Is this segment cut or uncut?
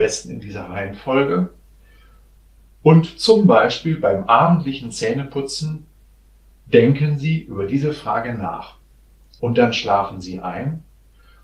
cut